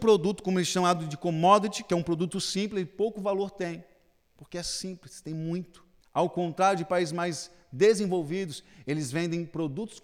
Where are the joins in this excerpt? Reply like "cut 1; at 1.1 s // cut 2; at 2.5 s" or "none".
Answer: cut 1; at 6.0 s